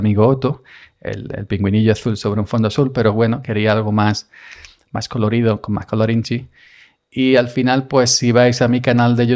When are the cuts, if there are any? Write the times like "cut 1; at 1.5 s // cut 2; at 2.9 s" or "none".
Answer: none